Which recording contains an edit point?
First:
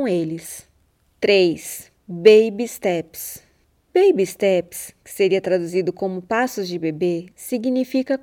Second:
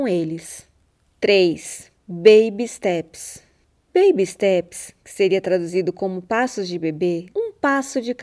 second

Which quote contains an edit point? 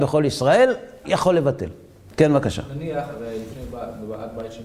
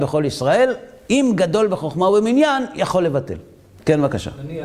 first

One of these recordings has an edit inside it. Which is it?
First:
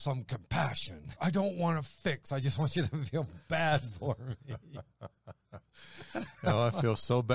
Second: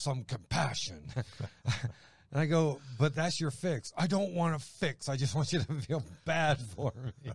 first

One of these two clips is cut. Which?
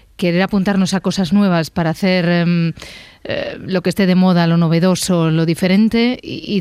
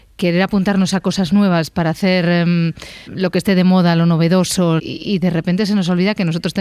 second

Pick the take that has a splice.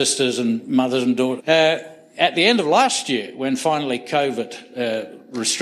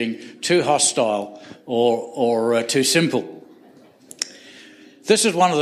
first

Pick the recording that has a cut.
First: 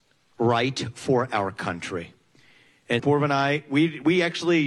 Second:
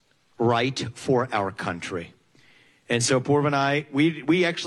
first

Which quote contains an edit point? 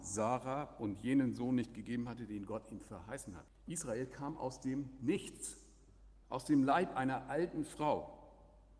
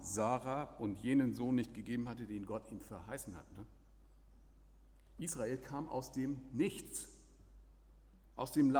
first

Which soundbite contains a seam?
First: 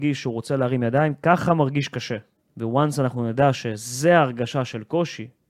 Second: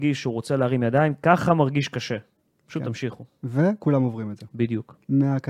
first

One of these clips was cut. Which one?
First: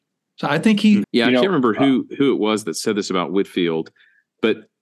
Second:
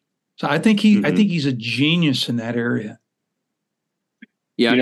first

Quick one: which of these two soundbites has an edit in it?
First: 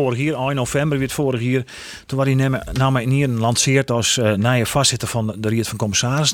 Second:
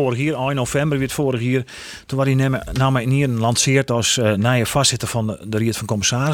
first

